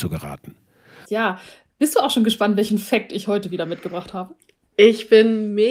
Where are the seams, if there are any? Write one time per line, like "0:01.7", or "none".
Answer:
0:01.0